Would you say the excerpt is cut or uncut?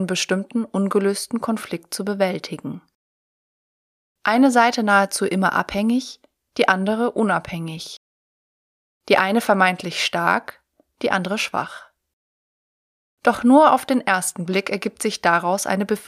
uncut